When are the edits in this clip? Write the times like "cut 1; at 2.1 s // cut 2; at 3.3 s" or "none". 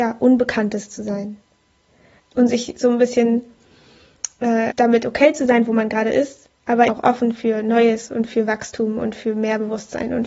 cut 1; at 2.2 s // cut 2; at 4.7 s // cut 3; at 6.9 s

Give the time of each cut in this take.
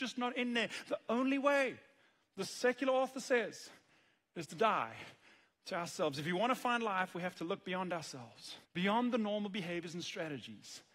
cut 1; at 8.6 s

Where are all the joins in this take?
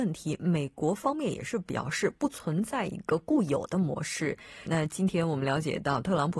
cut 1; at 4.7 s

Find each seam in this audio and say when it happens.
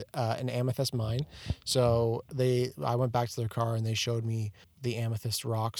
cut 1; at 4.6 s

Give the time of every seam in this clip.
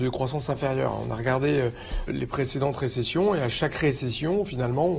cut 1; at 2.1 s

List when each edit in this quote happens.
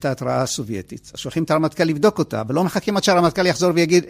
none

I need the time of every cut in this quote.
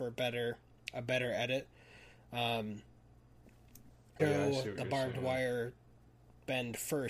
cut 1; at 4.2 s

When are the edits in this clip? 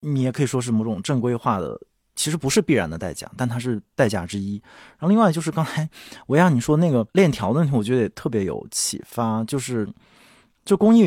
none

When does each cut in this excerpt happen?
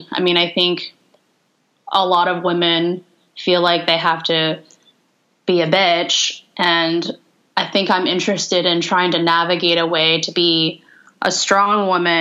none

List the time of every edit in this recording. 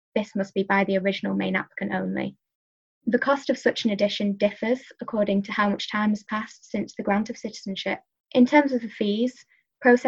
cut 1; at 8.2 s

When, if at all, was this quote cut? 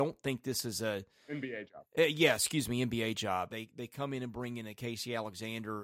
cut 1; at 3.5 s

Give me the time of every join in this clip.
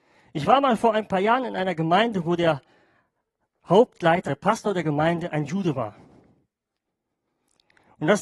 cut 1; at 4.3 s

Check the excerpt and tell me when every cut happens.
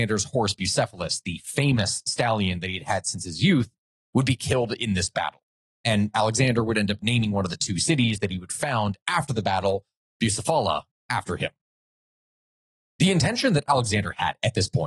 none

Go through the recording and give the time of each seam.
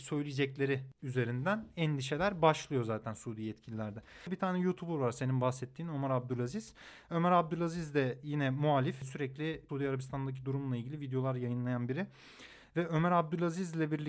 cut 1; at 9.7 s

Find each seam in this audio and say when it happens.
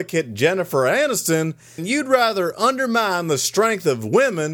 cut 1; at 1.8 s

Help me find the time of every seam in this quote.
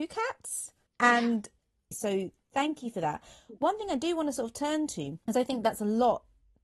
cut 1; at 1.9 s

